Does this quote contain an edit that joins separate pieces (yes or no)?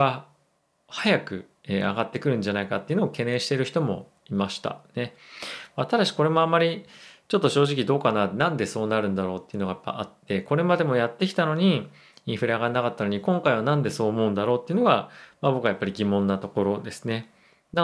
no